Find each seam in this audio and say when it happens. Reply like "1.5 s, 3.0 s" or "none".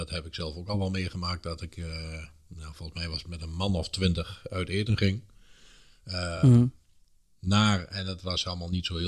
none